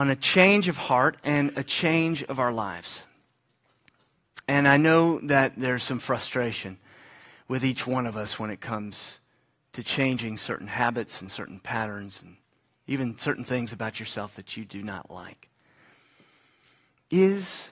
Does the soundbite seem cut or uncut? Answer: uncut